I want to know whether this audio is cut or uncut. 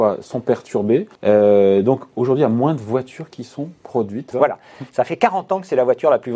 cut